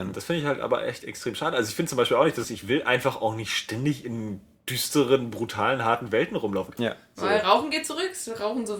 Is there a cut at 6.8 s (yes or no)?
yes